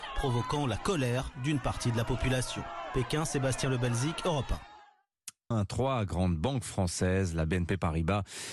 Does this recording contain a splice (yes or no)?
yes